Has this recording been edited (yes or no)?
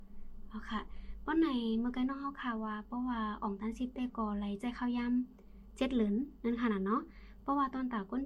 no